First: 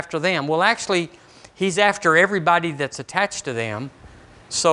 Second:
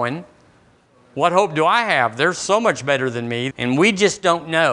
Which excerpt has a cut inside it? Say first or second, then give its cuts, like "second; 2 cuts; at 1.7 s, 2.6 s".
second; 1 cut; at 3.5 s